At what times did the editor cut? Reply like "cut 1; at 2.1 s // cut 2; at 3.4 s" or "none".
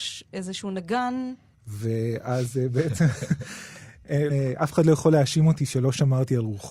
cut 1; at 1.5 s // cut 2; at 4.3 s